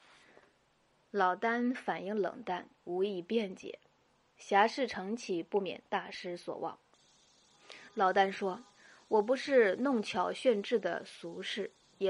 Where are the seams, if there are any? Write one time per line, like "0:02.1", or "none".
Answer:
0:06.9
0:08.7